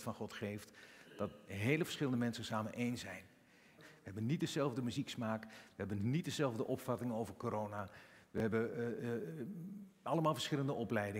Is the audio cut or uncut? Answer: cut